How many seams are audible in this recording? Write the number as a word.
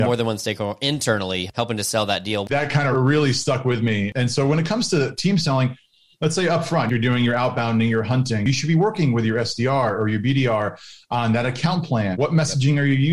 one